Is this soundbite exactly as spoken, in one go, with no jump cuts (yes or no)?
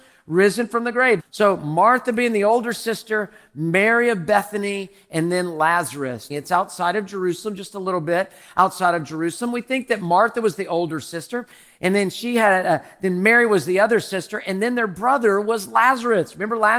no